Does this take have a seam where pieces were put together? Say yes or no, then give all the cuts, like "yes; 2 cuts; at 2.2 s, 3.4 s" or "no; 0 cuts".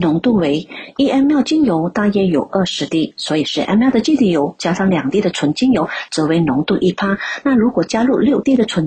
no; 0 cuts